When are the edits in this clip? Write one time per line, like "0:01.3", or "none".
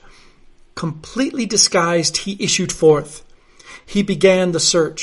none